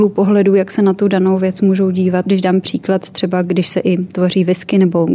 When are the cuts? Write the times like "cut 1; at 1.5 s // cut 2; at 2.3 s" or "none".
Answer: cut 1; at 2.2 s